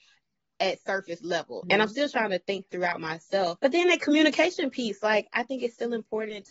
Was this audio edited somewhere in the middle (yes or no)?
yes